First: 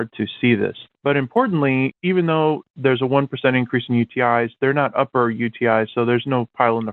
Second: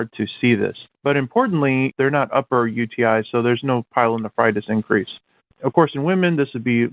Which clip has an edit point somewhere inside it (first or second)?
second